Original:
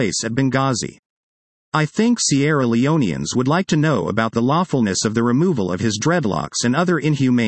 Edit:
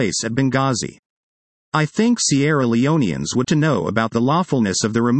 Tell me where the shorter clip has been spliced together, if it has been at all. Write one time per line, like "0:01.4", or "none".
0:03.4